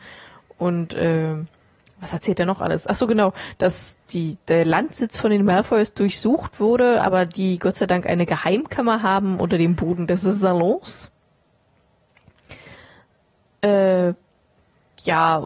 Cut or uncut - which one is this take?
uncut